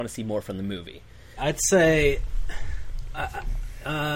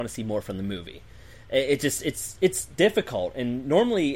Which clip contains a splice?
first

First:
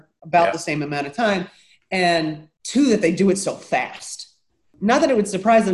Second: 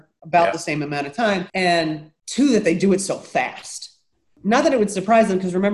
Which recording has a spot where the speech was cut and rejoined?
second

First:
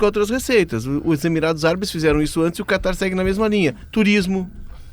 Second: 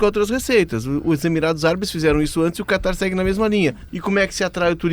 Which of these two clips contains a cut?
second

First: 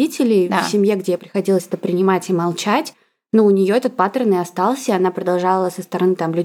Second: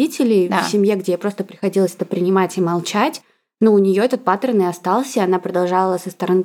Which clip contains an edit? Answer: first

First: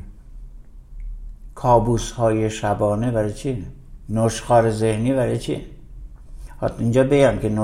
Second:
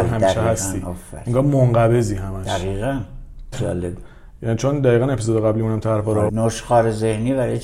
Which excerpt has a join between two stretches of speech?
second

